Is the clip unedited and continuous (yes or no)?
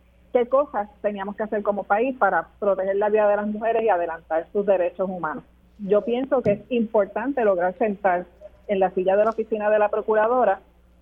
no